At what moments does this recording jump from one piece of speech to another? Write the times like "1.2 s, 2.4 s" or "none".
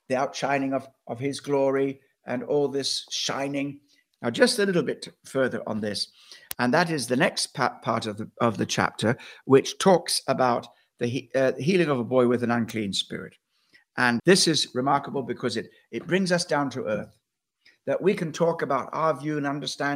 4.2 s, 14.2 s